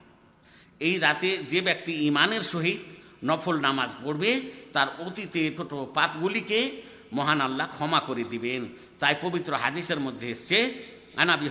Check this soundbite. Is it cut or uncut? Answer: cut